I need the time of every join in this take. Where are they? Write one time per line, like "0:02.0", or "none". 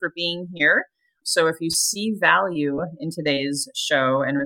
0:01.2